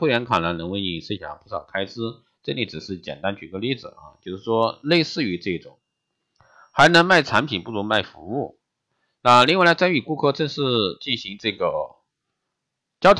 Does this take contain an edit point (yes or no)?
no